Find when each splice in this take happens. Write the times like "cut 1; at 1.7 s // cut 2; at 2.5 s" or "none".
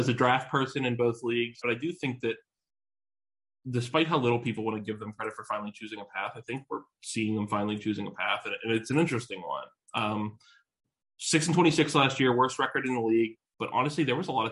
cut 1; at 1.6 s